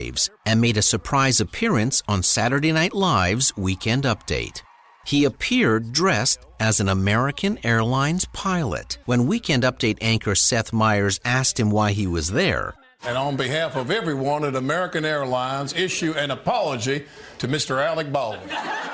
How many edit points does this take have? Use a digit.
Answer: 2